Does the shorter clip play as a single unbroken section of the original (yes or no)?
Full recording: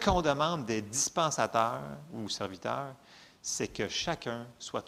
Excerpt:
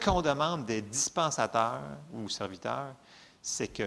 yes